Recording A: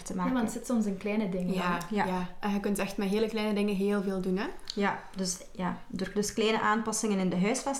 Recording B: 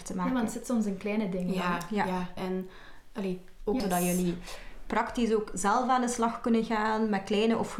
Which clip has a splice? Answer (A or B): B